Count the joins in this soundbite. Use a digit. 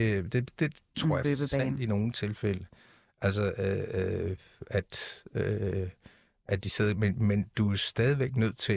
1